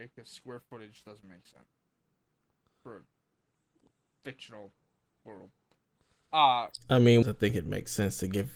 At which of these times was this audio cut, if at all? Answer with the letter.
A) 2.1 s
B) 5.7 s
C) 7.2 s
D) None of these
C